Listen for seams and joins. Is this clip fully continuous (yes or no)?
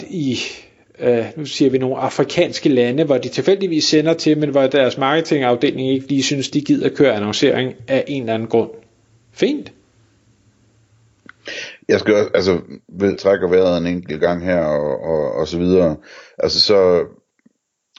no